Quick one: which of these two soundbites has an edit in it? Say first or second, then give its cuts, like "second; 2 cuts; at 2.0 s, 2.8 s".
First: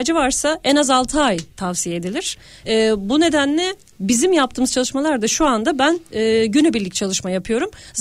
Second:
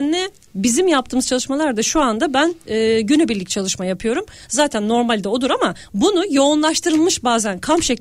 first; 1 cut; at 2.6 s